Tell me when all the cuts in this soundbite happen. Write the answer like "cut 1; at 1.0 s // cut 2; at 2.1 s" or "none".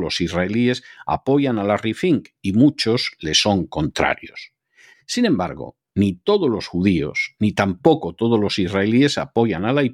cut 1; at 4.9 s